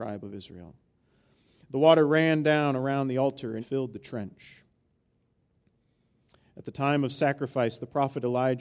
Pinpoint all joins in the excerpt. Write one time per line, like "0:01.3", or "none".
0:03.6